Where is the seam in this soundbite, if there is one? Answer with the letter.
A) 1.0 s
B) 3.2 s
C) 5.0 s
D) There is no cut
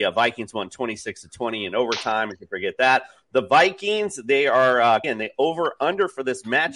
C